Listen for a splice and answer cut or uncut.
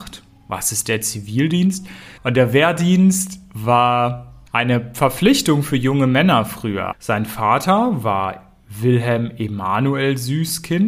cut